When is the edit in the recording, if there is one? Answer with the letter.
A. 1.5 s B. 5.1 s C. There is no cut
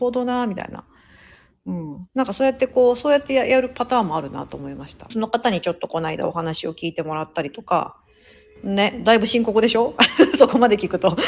B